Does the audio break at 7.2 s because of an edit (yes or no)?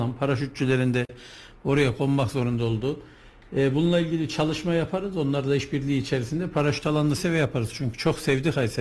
yes